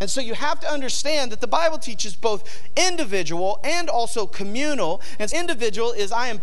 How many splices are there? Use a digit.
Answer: 1